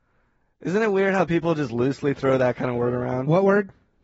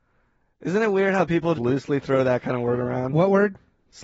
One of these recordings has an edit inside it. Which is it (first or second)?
second